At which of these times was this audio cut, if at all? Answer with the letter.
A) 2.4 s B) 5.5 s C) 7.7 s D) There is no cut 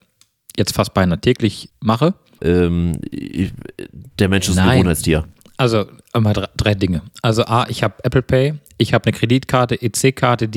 A